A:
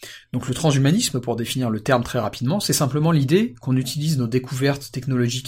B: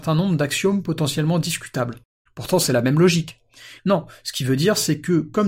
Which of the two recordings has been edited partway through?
B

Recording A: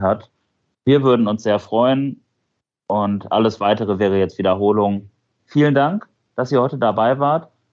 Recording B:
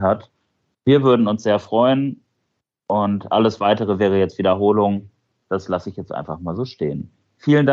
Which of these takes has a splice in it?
A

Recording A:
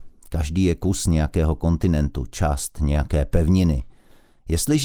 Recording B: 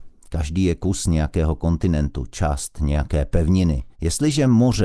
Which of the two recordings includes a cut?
B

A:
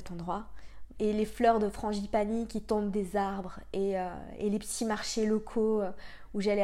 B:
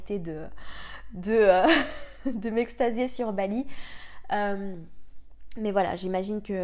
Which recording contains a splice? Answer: A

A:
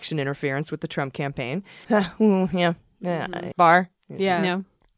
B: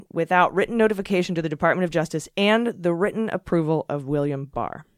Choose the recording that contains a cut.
A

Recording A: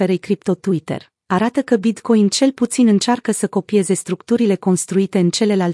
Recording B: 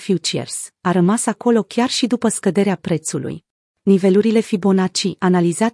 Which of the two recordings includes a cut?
B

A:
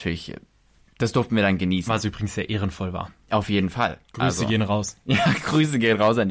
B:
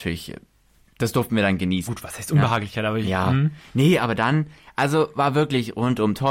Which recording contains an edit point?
B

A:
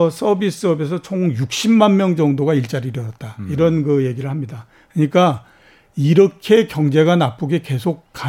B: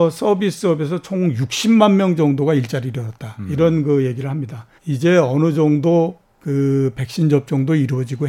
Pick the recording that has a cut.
B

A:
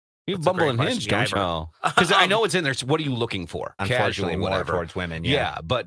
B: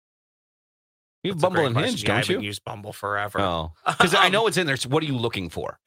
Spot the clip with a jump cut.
A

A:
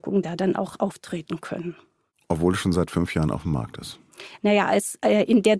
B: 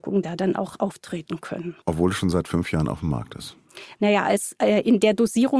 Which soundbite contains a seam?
B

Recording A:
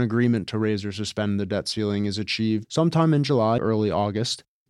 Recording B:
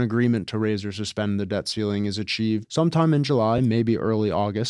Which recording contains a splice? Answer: A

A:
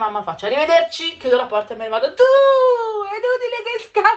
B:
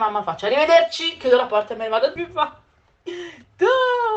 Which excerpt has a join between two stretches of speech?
B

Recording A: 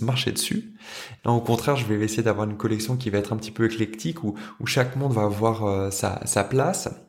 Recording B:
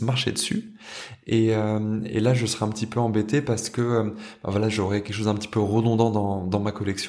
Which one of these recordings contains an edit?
A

